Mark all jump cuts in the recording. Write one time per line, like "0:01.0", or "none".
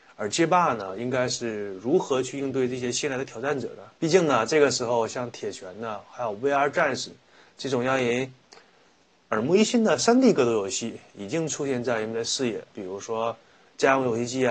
0:04.0
0:12.7